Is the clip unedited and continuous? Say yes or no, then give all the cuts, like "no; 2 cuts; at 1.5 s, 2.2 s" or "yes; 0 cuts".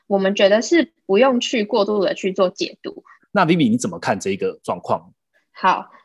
no; 1 cut; at 3.2 s